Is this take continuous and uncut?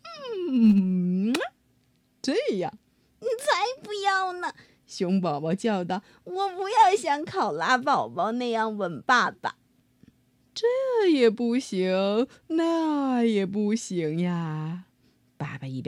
yes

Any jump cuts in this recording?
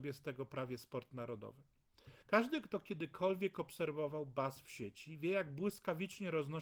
yes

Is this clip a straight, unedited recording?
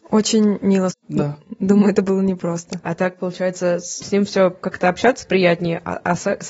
no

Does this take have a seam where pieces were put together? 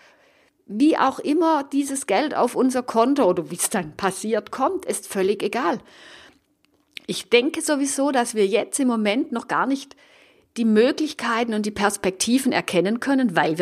no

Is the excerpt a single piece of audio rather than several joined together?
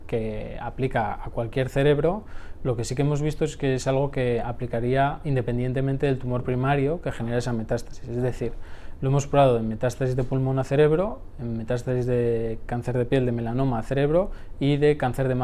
yes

